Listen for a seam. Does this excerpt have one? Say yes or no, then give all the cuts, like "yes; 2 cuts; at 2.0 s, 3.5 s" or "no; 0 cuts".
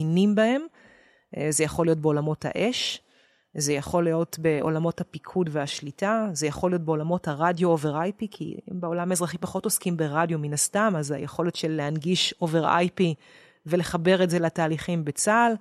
no; 0 cuts